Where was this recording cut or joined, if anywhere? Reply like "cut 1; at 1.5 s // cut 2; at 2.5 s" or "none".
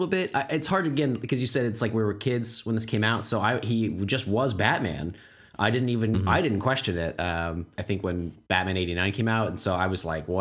cut 1; at 7.8 s